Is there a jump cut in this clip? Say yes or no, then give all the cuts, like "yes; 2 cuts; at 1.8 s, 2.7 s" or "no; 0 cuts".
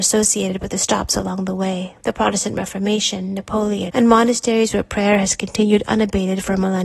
yes; 2 cuts; at 2.0 s, 3.9 s